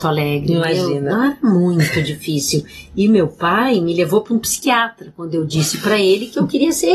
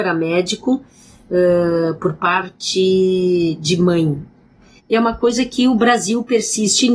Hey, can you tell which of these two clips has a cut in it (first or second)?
second